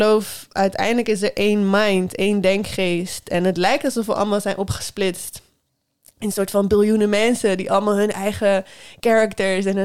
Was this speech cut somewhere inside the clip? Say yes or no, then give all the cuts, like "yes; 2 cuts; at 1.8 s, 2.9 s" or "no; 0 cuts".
no; 0 cuts